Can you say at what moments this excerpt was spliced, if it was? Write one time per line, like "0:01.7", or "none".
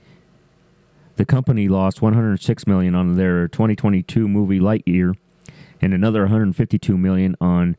none